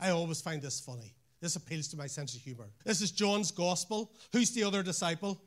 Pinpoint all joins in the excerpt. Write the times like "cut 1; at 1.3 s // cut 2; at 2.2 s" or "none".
cut 1; at 2.8 s